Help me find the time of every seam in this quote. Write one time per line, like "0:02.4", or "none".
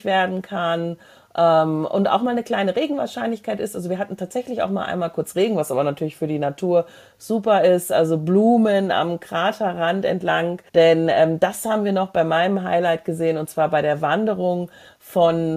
0:10.7

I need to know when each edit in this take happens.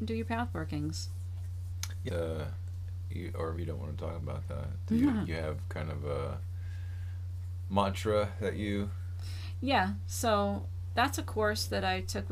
0:02.1
0:03.6

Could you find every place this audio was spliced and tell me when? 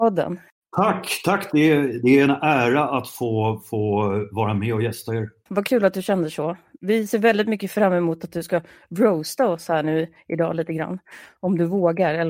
none

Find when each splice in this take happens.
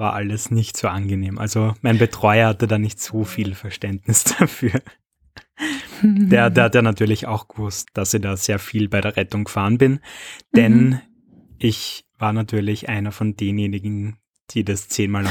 0:07.8

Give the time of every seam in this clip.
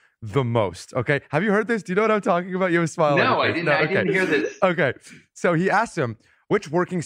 none

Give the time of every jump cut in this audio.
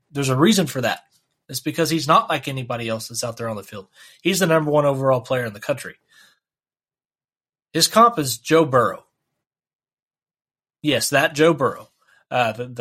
none

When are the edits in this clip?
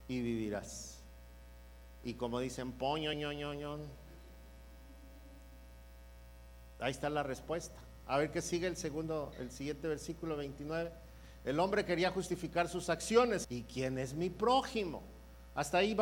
0:03.1
0:13.4

